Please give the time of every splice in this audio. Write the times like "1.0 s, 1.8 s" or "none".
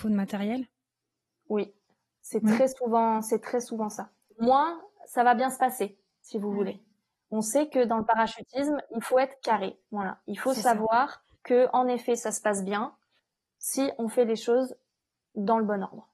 4.3 s